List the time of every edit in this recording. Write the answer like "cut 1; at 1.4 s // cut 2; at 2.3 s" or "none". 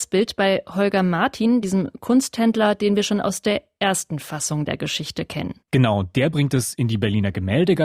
none